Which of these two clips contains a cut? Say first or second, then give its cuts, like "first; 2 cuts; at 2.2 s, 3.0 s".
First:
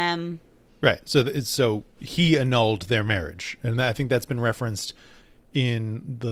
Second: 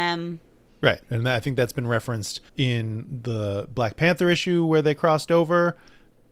second; 2 cuts; at 1.0 s, 2.5 s